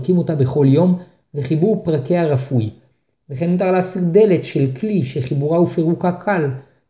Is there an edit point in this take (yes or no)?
no